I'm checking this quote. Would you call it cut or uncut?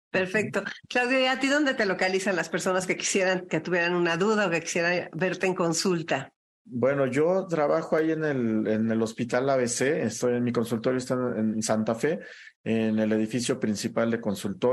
uncut